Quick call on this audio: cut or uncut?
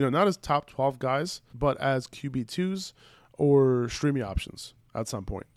cut